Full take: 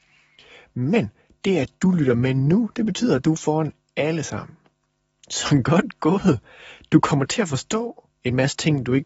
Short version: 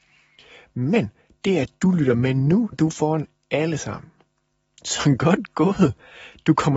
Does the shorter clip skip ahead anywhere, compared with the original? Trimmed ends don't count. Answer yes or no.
yes